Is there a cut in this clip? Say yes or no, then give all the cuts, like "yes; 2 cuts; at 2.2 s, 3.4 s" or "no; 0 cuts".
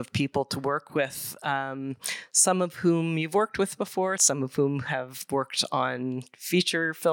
yes; 1 cut; at 4.2 s